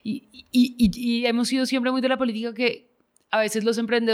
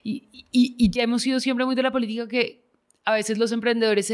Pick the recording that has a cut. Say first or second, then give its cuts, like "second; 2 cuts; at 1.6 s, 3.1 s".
second; 1 cut; at 1.0 s